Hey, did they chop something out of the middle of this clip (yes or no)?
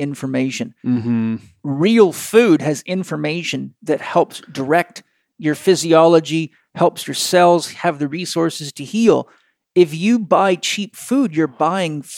no